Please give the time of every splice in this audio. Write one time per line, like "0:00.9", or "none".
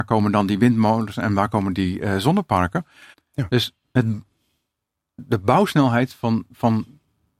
0:03.1